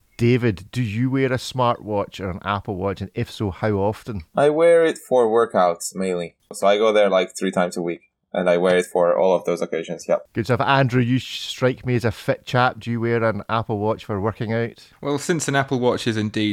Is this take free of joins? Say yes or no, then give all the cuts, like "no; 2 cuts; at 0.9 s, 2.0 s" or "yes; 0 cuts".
yes; 0 cuts